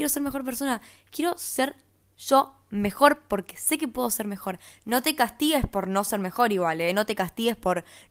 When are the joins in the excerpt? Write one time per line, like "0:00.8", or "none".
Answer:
none